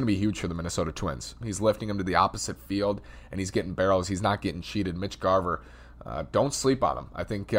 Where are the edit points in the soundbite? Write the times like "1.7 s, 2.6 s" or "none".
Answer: 1.4 s